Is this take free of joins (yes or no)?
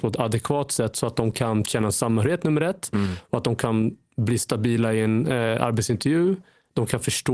yes